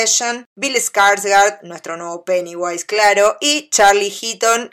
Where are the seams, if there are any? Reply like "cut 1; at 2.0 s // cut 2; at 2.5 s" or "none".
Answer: none